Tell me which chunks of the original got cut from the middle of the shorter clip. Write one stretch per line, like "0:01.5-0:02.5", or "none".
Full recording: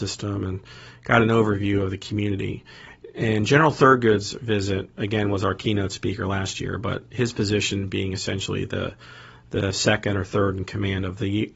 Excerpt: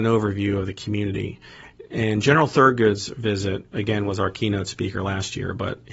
none